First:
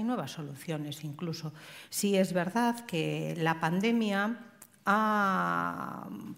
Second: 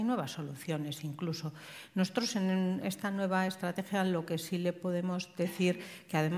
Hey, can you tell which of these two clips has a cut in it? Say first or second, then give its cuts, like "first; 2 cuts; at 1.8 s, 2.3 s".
first; 1 cut; at 1.9 s